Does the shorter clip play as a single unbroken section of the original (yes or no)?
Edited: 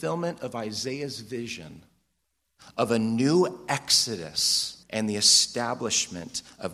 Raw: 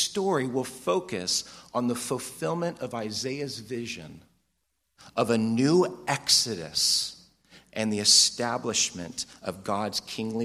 no